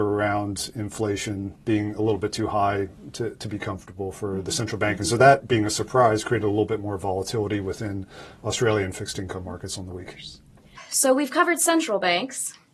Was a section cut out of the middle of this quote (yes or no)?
no